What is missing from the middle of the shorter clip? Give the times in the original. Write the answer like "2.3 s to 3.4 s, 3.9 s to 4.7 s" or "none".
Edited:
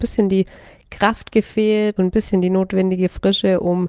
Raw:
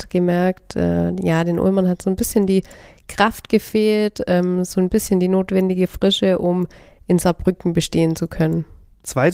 4.1 s to 4.7 s